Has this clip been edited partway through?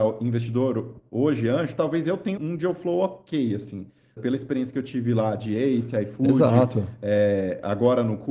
yes; 2 cuts; at 2.4 s, 4.2 s

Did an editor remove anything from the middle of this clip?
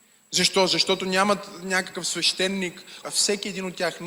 yes; 1 cut; at 3.0 s

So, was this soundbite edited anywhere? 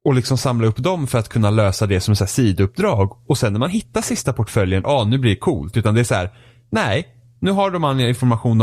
yes; 1 cut; at 4.8 s

